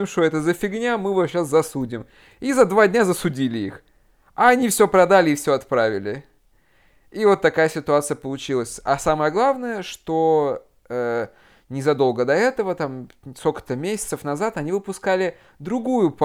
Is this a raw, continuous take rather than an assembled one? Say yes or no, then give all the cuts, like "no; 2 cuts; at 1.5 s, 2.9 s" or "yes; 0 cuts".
yes; 0 cuts